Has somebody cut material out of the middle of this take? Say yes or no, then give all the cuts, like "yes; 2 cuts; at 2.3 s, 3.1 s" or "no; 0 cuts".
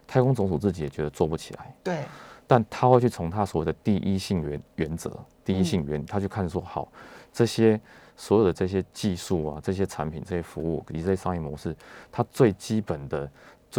no; 0 cuts